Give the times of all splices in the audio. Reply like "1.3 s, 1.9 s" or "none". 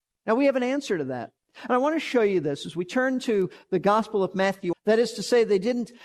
1.6 s, 4.7 s